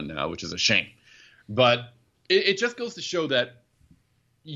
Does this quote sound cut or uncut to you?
uncut